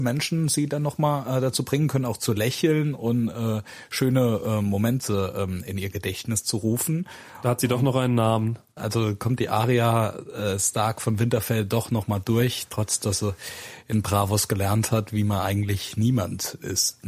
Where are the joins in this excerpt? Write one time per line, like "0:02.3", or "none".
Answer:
0:08.8